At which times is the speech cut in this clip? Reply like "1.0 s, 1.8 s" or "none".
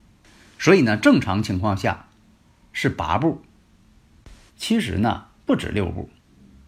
4.5 s